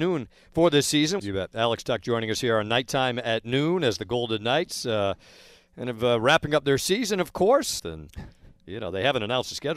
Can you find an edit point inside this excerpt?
yes; 2 cuts; at 1.2 s, 7.8 s

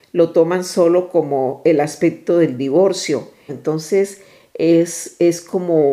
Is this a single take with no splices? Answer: no; 1 cut; at 3.5 s

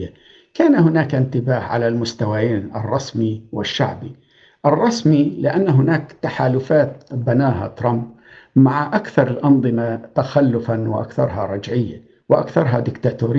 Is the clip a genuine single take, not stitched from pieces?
yes; 0 cuts

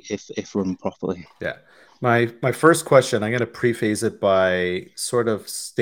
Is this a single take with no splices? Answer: no; 1 cut; at 1.3 s

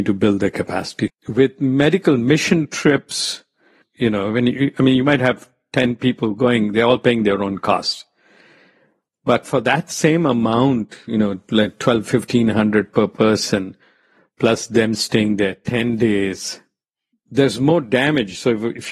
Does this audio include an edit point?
yes; 2 cuts; at 1.1 s, 3.8 s

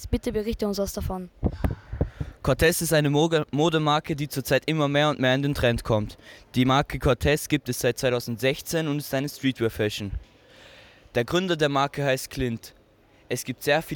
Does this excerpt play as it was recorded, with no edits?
no; 1 cut; at 2.4 s

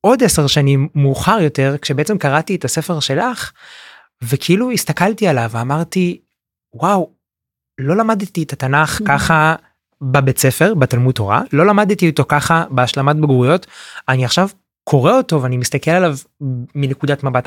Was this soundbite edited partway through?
no; 0 cuts

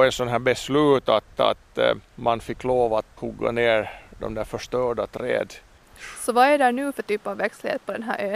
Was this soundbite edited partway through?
yes; 1 cut; at 3.2 s

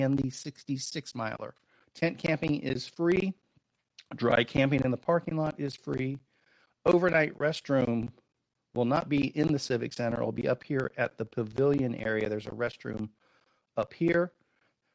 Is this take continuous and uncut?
no; 1 cut; at 1.8 s

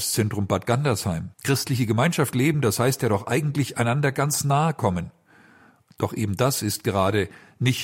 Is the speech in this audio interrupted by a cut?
yes; 1 cut; at 1.3 s

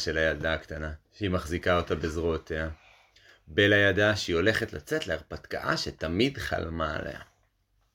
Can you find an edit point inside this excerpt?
yes; 1 cut; at 1.1 s

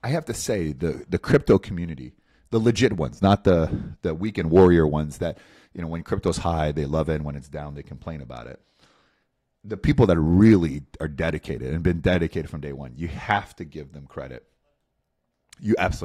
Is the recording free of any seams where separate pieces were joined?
yes; 0 cuts

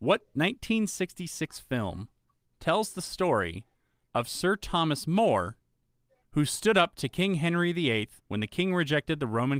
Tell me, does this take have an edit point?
yes; 2 cuts; at 6.2 s, 8.2 s

